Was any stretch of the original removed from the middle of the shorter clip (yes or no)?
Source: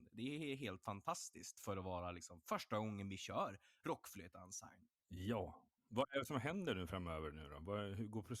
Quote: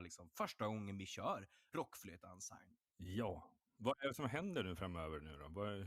no